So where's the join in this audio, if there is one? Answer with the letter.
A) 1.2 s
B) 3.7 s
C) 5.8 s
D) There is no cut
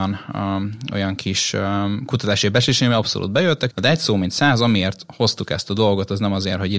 B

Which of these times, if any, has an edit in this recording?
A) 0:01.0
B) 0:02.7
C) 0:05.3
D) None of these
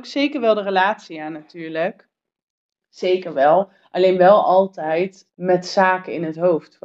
C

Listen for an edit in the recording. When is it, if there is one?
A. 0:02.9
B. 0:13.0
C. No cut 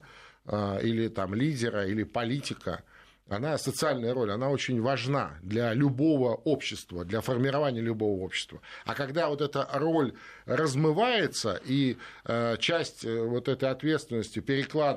C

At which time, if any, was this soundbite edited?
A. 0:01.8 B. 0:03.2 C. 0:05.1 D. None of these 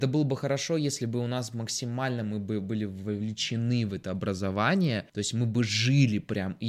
C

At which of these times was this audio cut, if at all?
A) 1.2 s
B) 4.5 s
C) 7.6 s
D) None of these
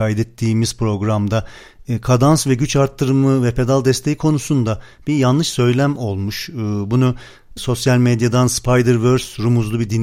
C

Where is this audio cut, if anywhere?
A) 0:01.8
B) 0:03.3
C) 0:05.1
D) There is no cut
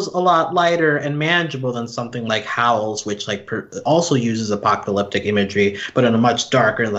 D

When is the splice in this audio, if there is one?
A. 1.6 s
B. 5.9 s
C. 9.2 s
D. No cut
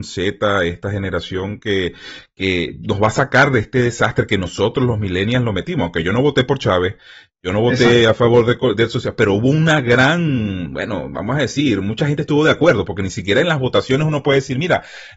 D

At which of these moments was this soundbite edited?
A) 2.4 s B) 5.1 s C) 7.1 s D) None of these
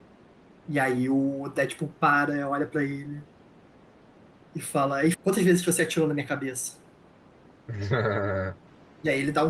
B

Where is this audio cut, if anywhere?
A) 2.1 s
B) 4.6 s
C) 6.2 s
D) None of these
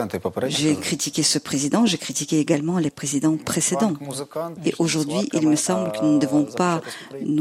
B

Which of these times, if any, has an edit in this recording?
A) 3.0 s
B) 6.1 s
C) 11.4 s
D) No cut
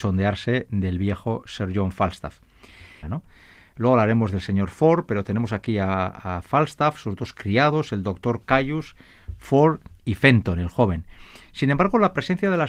A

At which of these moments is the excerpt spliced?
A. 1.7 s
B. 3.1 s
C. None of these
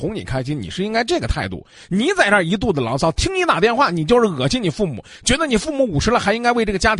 C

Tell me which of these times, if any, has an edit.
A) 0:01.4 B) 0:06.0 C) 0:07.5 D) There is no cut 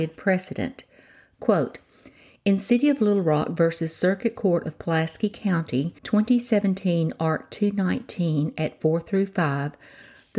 B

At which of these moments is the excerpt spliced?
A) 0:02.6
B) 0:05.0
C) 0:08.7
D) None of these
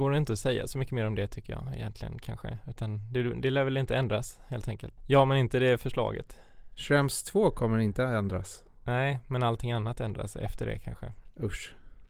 B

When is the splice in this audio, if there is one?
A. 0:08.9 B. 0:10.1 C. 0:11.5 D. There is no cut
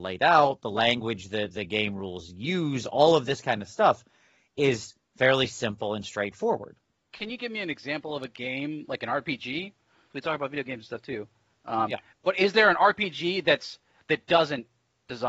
B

